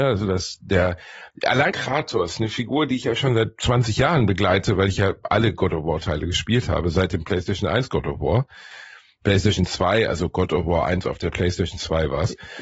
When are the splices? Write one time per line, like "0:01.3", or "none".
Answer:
0:01.7

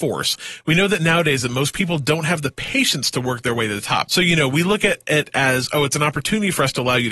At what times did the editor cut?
0:04.0

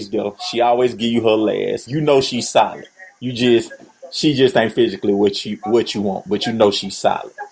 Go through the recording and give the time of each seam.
none

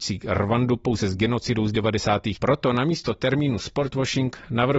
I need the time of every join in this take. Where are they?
0:02.4

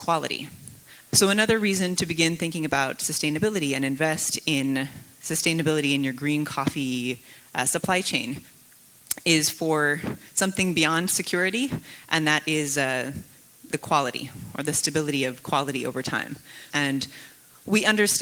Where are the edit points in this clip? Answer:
0:01.0
0:13.7
0:16.7

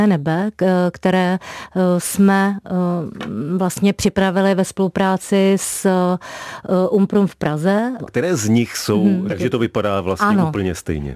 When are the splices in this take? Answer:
0:08.1
0:09.3

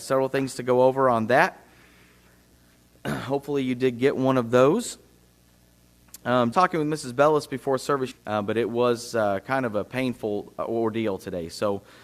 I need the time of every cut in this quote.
0:06.5
0:08.1

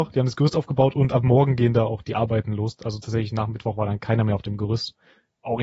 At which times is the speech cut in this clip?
none

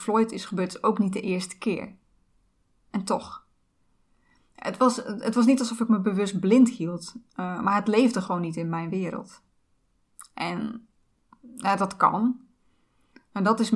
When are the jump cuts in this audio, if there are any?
none

